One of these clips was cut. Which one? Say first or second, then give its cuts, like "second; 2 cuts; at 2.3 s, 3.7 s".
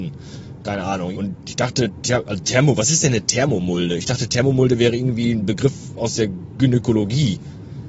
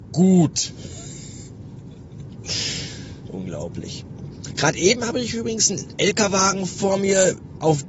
first; 1 cut; at 1.1 s